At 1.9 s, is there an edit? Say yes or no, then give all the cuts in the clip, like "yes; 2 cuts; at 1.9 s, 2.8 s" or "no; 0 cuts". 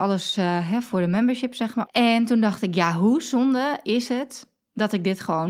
yes; 1 cut; at 1.9 s